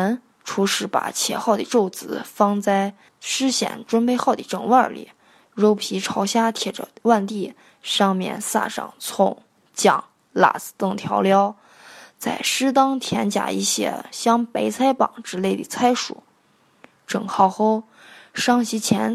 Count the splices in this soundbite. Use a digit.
0